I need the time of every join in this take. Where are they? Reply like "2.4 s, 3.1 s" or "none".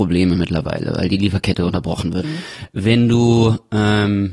2.2 s